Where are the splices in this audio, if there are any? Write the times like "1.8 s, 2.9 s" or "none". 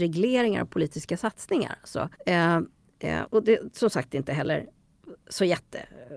2.1 s, 3.3 s